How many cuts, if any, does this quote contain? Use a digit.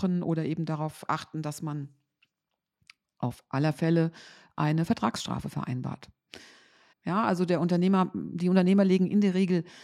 1